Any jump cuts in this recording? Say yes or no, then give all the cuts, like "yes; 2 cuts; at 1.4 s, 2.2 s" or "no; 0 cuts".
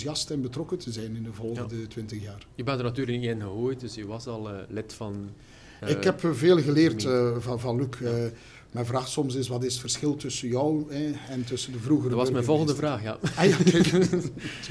no; 0 cuts